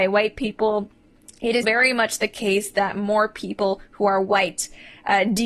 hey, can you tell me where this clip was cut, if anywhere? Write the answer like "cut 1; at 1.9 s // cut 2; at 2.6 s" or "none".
cut 1; at 1.6 s